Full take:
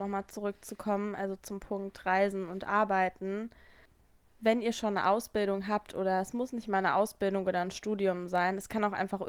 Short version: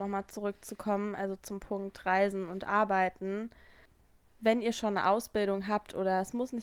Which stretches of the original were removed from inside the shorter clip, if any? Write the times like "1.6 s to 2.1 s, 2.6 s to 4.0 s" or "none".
none

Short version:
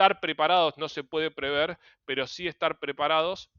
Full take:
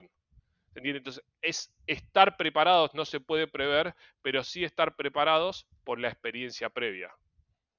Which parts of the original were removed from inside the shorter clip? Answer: none

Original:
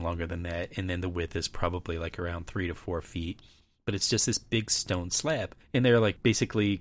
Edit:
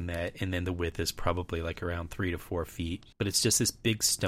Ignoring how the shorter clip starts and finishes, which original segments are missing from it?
3.5 s to 3.8 s

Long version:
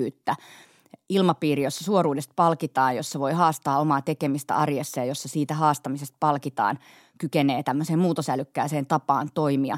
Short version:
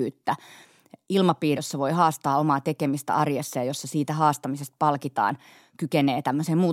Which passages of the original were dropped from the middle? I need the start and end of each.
1.6 s to 3.0 s

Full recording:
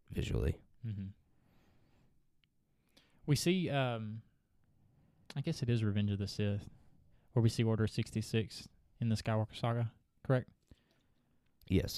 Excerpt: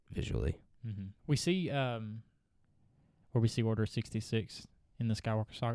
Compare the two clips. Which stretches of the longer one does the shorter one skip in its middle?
1.2 s to 3.2 s, 5.2 s to 7.2 s

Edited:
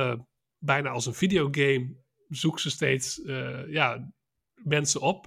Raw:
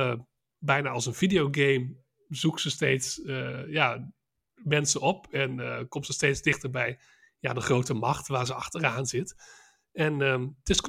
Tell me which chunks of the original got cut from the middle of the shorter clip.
none

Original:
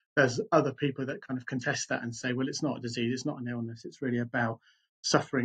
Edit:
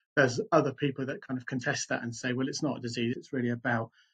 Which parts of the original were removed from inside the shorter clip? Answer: 3.1 s to 3.8 s

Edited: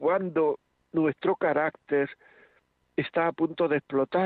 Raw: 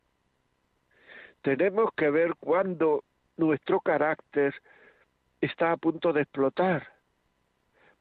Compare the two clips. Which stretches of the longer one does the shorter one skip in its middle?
none

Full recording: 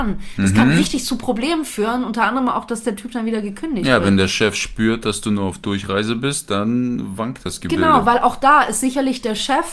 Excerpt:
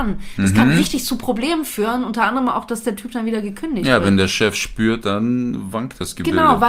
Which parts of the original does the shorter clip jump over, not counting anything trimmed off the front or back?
5.0 s to 6.5 s

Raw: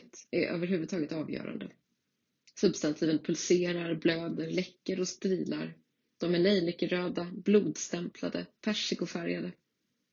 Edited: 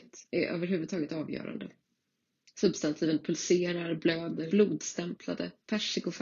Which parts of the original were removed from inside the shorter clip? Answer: 4.5 s to 7.4 s

